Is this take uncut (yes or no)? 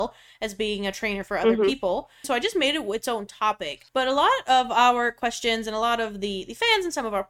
no